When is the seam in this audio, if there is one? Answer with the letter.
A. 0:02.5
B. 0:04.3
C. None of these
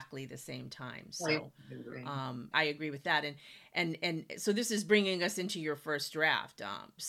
A